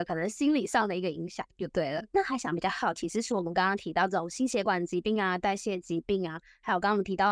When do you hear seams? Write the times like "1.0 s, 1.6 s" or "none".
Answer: none